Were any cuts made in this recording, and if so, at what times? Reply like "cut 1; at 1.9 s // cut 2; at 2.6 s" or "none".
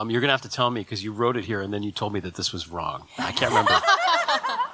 none